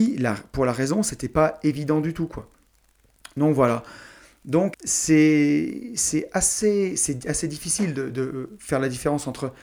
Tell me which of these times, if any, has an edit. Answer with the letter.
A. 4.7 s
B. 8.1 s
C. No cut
A